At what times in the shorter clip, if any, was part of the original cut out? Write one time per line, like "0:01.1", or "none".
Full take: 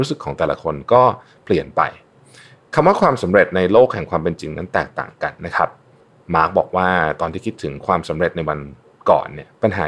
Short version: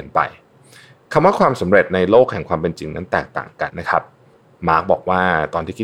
0:03.7